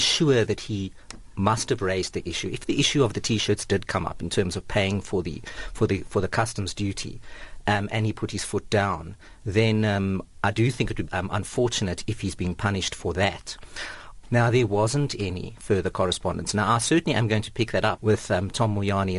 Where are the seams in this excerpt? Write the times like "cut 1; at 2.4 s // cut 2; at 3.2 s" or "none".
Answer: cut 1; at 11.1 s // cut 2; at 14.2 s // cut 3; at 18.0 s